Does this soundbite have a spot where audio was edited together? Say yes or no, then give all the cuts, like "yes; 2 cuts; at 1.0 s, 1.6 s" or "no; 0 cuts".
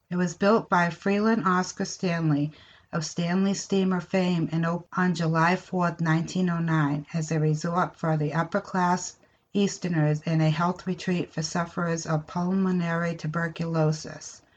no; 0 cuts